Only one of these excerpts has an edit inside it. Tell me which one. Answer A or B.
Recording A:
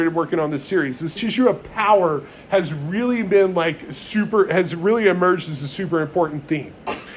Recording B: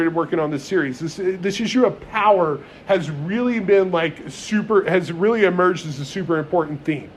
A